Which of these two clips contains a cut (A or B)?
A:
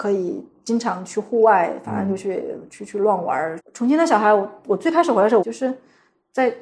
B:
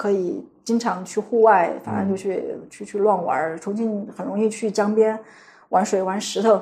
A